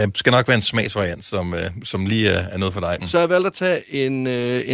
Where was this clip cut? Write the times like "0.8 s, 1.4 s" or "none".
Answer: 3.0 s